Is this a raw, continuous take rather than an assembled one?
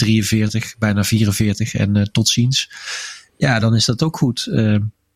yes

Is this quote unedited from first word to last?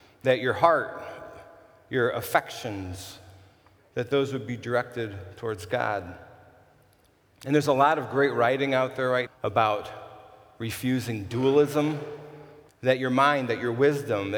no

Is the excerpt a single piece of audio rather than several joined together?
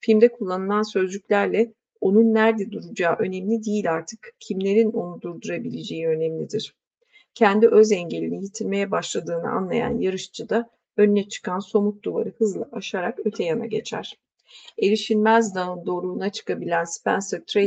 yes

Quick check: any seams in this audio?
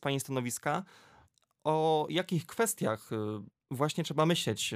no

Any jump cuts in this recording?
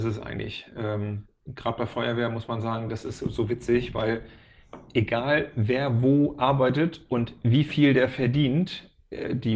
no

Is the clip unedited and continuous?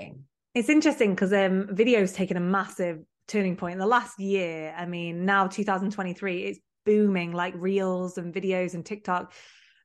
yes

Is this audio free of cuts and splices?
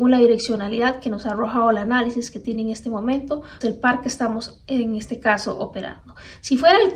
no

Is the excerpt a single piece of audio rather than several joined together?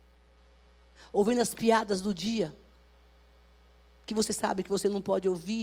yes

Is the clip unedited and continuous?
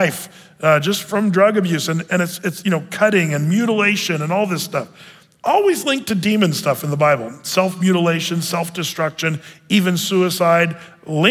yes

